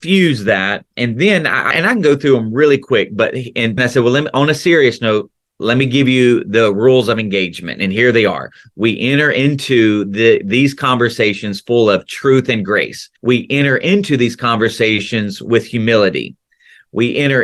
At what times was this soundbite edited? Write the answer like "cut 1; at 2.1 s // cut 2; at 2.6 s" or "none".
cut 1; at 1.7 s // cut 2; at 3.8 s // cut 3; at 13.2 s